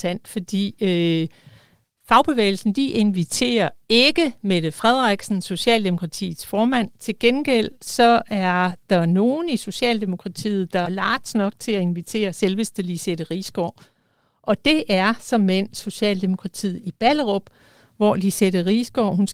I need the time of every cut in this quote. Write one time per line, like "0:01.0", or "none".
0:10.8